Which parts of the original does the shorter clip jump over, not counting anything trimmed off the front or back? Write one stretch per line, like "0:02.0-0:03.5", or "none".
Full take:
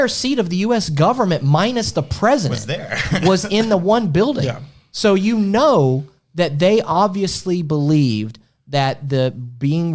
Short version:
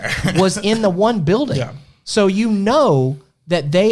none